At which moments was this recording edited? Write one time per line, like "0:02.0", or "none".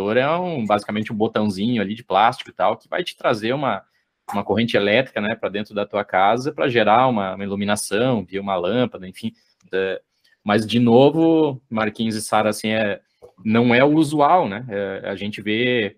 0:09.7